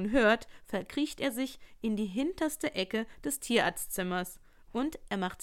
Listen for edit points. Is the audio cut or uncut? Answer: uncut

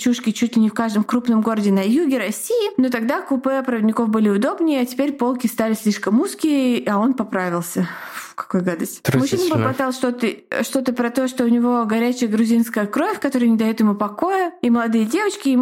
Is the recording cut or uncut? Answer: uncut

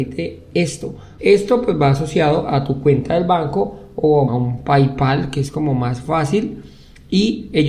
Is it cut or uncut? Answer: cut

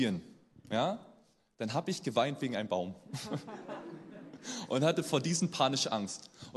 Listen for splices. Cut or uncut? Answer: uncut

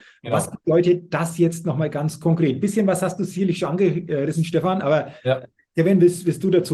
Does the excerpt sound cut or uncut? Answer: uncut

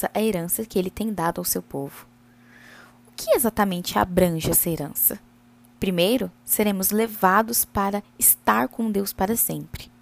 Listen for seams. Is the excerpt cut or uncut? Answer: uncut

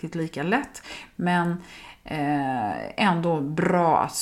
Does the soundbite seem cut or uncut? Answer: uncut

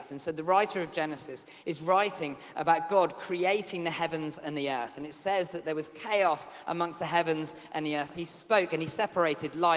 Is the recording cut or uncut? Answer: cut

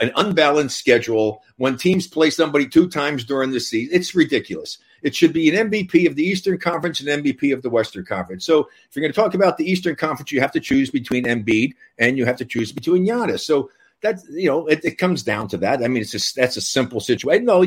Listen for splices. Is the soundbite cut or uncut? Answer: uncut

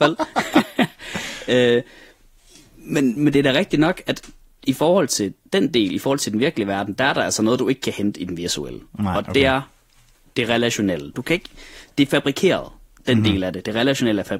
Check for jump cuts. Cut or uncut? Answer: cut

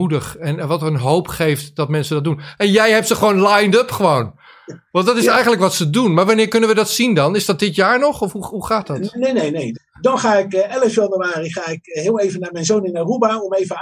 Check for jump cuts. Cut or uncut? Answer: cut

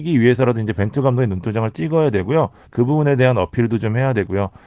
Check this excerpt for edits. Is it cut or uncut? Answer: cut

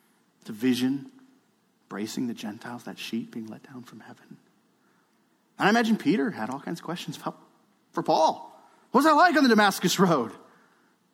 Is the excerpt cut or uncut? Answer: uncut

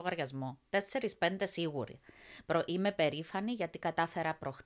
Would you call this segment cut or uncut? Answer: uncut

